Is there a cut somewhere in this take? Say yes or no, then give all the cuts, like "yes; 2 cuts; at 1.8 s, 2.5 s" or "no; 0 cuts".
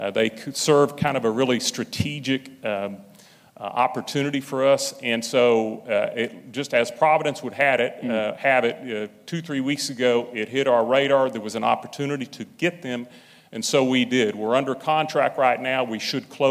no; 0 cuts